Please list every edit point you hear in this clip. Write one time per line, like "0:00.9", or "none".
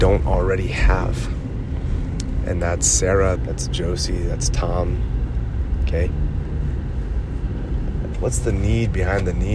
0:03.4
0:08.1